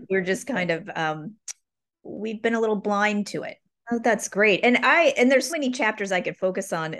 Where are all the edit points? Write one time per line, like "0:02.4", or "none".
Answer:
0:03.8
0:05.5